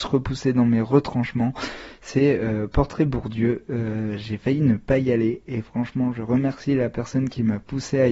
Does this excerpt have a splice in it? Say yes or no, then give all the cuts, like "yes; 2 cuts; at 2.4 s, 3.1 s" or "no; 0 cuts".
no; 0 cuts